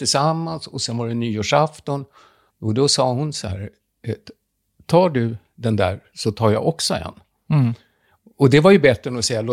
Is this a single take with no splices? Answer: no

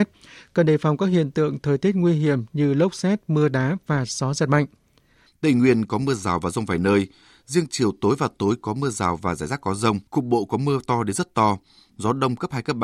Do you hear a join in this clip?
yes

